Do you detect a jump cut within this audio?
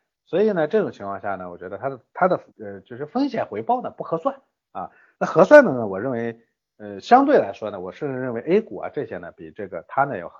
yes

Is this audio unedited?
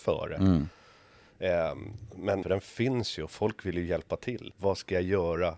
no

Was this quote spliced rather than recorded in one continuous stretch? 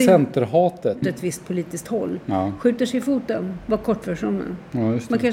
yes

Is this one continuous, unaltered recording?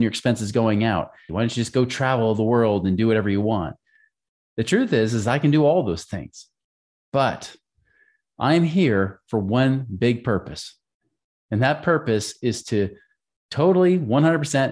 no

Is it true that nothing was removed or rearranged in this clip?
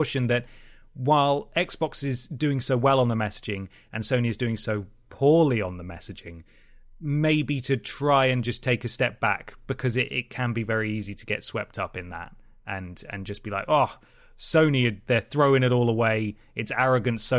yes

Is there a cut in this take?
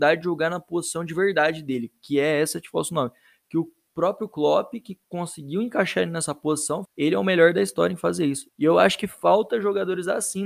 yes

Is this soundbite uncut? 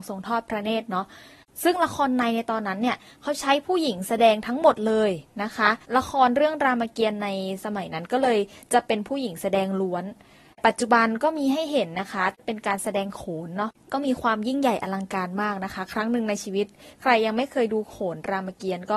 no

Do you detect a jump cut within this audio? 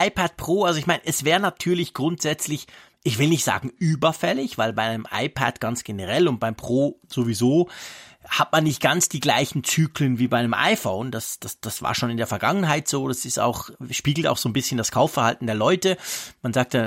no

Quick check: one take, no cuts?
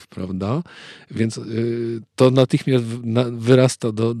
yes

